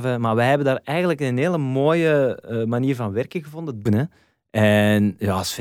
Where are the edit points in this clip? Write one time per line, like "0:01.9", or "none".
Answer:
0:03.9